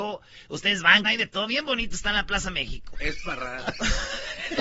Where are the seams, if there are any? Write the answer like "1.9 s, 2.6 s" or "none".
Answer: 1.0 s, 2.9 s